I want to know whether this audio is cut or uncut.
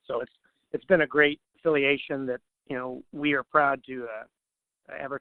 cut